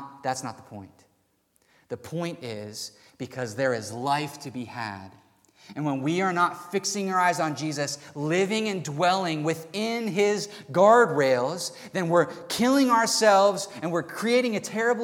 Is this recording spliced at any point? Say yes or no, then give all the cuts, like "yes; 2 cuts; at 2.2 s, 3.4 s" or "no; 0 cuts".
no; 0 cuts